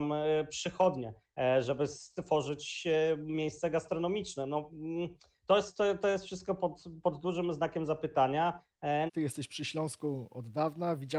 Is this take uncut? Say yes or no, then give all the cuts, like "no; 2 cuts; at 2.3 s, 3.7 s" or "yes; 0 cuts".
no; 1 cut; at 9.1 s